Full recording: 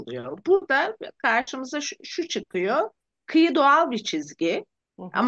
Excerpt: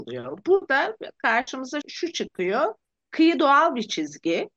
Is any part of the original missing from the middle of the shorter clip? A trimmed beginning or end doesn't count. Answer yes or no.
yes